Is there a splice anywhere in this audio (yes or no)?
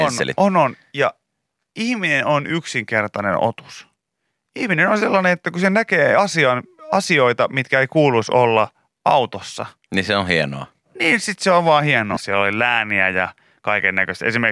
yes